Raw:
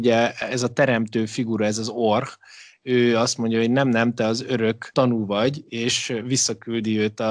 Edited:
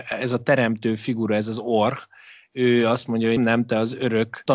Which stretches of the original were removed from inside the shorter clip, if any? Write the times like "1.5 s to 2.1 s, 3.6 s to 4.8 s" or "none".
3.7 s to 3.8 s